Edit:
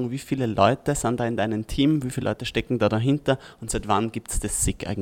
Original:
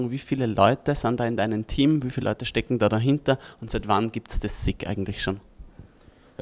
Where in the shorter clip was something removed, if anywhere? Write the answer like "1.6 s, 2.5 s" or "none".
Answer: none